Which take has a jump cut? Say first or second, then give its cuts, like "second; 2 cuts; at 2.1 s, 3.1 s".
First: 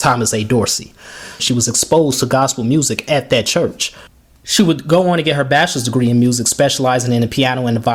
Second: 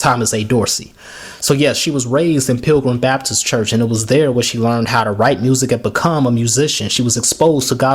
first; 1 cut; at 1.4 s